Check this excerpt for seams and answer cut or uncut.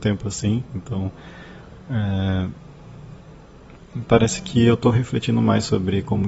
uncut